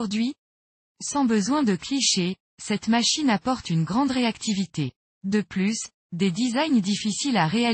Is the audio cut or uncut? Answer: uncut